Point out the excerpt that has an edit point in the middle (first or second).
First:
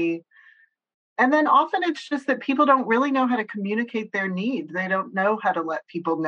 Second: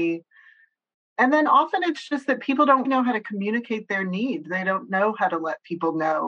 second